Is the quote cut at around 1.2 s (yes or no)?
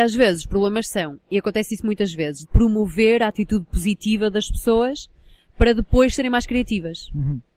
no